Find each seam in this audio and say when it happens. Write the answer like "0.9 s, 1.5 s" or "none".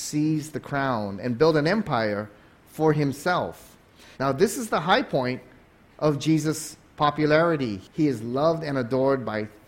4.1 s, 7.9 s